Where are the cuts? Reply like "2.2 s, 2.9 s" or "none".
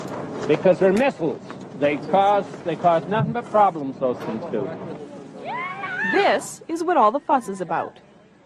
none